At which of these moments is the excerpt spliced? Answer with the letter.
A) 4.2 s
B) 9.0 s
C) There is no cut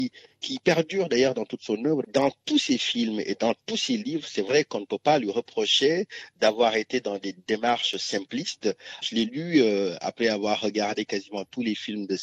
B